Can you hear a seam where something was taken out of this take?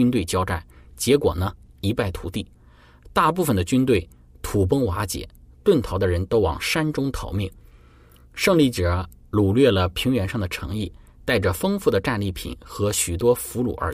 no; 0 cuts

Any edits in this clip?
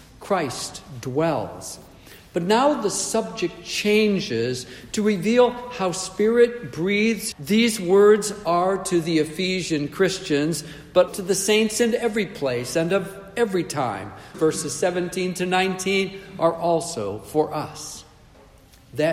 yes; 3 cuts; at 7.3 s, 11.1 s, 14.3 s

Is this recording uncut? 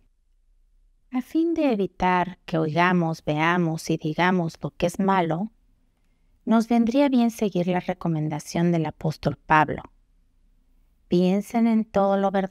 no; 1 cut; at 1.0 s

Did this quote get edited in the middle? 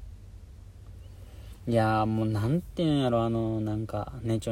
no; 0 cuts

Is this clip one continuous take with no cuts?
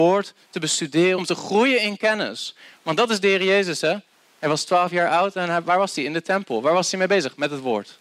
no; 1 cut; at 1.2 s

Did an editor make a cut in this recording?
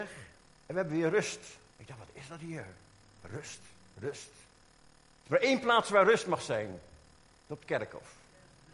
yes; 1 cut; at 1.7 s

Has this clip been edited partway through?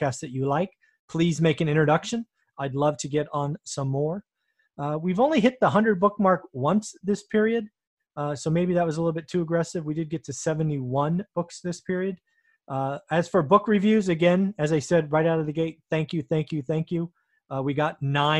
no; 0 cuts

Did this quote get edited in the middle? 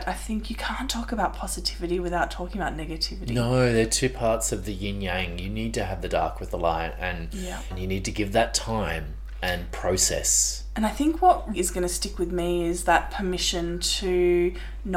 yes; 2 cuts; at 7.7 s, 11.5 s

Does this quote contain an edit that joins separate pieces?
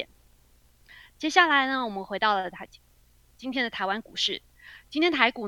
no; 0 cuts

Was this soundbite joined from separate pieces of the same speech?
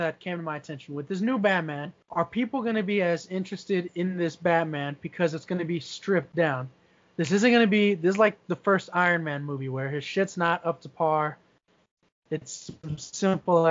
yes; 1 cut; at 2.0 s

